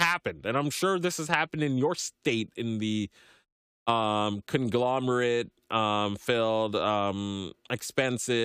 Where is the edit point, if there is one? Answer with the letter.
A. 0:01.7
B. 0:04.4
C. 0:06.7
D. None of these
D